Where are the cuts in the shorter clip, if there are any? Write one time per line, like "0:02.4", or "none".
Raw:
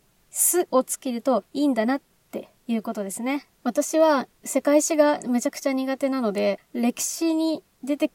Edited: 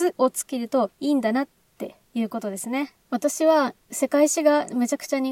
none